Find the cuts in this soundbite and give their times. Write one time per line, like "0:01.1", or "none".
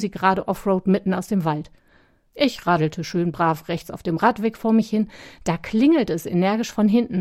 0:02.3

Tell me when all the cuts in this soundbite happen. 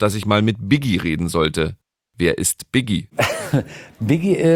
none

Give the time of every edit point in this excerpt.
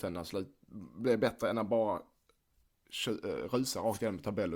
none

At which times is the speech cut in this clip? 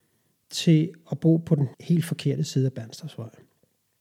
0:01.7

